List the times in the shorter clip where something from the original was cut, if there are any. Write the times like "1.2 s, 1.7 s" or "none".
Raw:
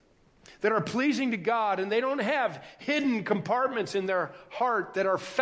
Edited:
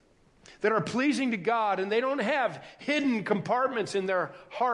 none